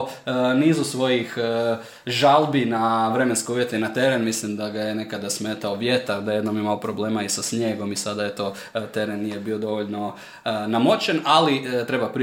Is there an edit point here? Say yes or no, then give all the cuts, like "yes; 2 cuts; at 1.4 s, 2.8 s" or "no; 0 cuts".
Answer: no; 0 cuts